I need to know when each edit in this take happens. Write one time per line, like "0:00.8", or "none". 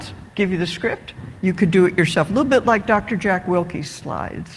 none

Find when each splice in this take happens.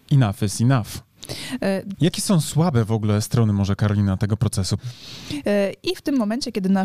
0:01.9
0:04.8

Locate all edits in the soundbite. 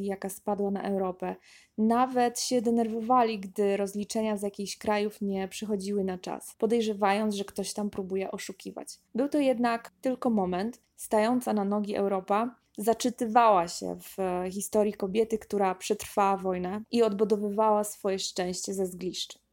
0:09.1
0:10.8

